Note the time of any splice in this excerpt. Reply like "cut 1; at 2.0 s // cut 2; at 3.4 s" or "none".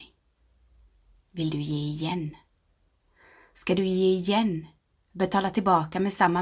none